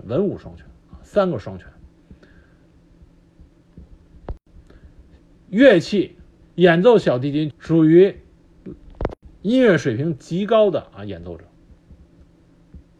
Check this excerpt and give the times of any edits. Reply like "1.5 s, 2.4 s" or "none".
6.4 s, 7.5 s